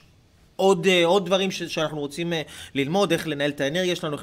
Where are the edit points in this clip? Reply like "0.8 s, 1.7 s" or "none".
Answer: none